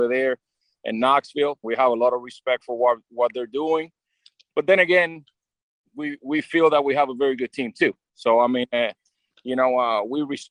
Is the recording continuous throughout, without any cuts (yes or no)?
no